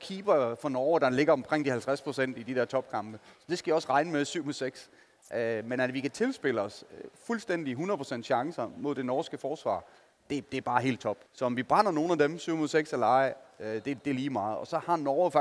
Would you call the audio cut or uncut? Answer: cut